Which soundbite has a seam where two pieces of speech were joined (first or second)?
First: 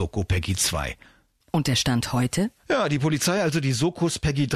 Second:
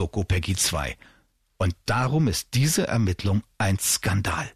first